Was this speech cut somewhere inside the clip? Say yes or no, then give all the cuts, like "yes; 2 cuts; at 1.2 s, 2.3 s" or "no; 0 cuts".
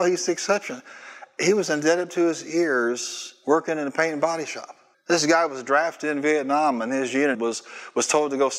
yes; 2 cuts; at 4.9 s, 7.3 s